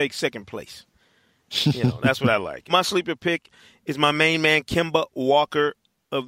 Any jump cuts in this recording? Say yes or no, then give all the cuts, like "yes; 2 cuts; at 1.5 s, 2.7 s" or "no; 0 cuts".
yes; 1 cut; at 2.7 s